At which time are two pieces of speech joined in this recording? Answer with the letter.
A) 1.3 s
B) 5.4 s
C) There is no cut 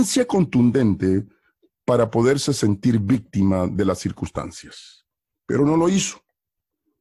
C